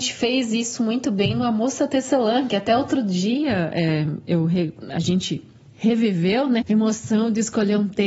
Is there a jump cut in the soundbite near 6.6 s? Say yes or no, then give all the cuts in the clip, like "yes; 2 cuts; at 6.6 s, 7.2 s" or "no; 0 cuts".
yes; 1 cut; at 6.6 s